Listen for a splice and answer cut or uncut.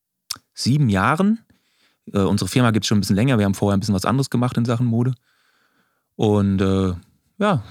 uncut